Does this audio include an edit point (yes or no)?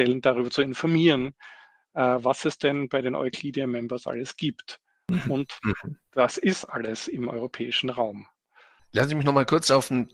no